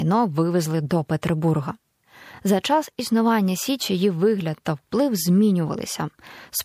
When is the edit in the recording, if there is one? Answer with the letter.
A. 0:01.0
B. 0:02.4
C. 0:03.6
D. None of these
D